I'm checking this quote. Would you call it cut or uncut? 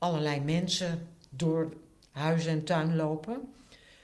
uncut